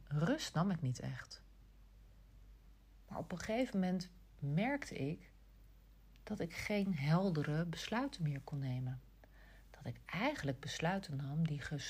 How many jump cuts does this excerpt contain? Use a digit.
1